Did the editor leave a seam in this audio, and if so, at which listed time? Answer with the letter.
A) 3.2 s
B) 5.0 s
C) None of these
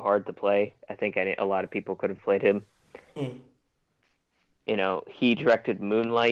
A